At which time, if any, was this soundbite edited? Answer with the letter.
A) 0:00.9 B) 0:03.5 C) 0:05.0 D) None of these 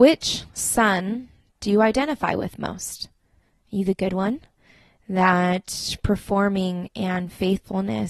D